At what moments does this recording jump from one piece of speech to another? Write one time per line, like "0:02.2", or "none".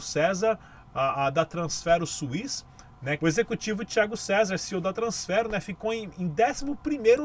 0:03.2